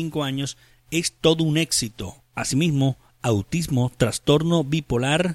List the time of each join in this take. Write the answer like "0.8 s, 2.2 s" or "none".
2.3 s